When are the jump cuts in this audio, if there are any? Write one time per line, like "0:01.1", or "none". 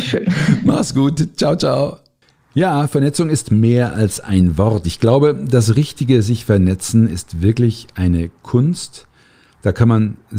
none